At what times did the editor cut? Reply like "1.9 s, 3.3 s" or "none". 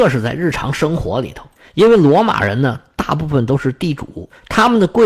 none